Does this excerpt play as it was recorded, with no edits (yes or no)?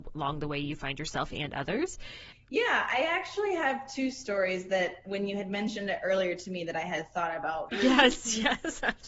no